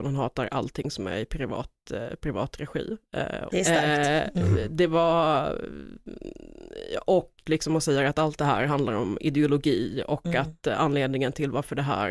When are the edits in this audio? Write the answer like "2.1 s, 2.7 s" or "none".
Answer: 3.5 s